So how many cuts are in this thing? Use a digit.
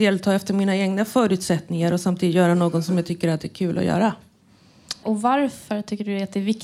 1